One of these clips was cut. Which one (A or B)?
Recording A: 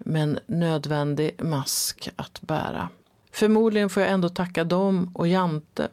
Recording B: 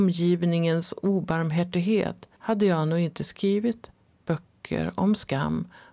B